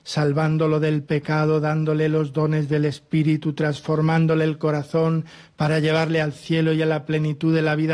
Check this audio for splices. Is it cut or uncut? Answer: uncut